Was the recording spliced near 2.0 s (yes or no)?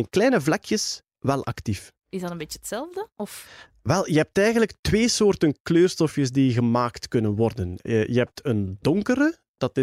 yes